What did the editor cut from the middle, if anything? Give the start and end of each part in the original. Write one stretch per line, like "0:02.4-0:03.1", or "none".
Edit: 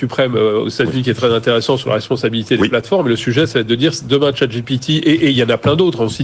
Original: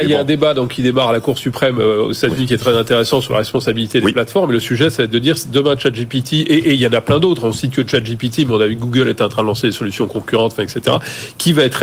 none